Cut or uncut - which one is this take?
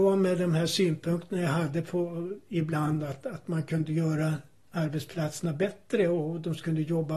uncut